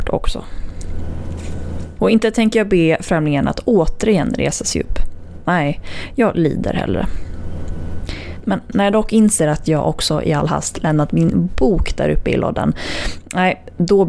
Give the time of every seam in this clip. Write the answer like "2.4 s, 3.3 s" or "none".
none

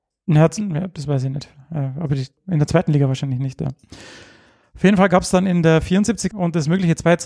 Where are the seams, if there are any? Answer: 2.4 s, 6.3 s

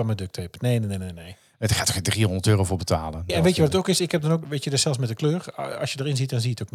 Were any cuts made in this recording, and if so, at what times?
3.3 s, 4.4 s

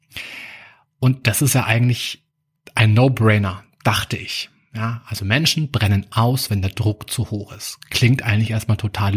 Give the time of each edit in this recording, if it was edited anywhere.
none

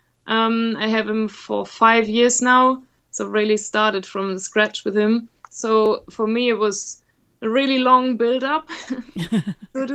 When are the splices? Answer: 5.4 s

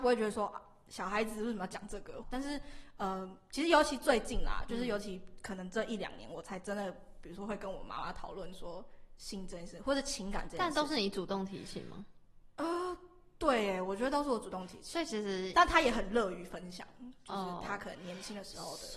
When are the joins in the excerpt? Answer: 2.2 s

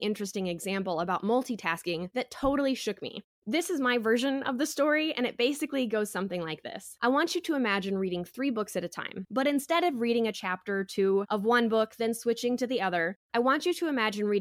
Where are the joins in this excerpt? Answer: none

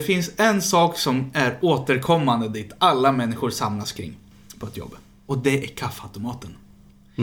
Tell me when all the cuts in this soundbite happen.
none

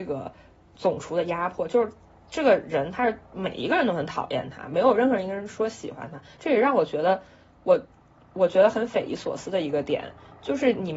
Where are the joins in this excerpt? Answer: none

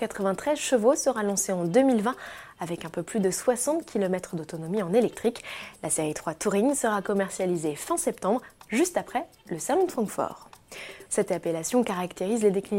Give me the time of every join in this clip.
11.1 s

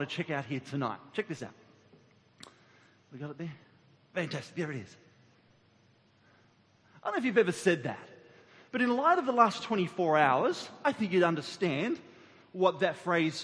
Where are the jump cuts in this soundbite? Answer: none

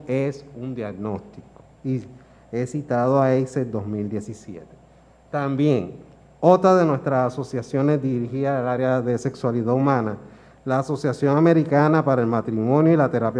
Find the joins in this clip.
none

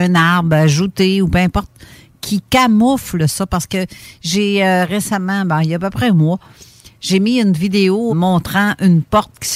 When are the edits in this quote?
8.1 s

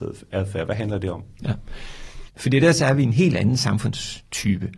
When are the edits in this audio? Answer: 2.3 s

